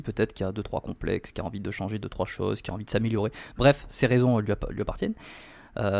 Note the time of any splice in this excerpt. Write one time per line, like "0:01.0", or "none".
none